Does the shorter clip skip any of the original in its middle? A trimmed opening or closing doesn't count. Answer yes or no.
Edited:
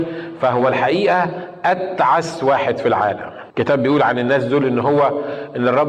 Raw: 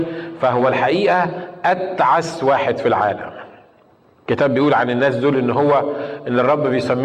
yes